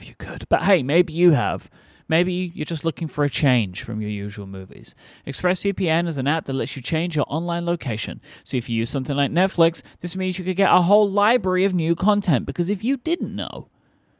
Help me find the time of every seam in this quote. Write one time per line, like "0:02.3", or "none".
none